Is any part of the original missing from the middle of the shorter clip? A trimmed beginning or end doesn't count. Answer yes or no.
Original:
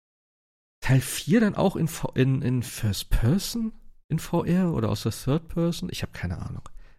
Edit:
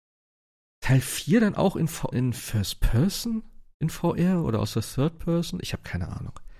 yes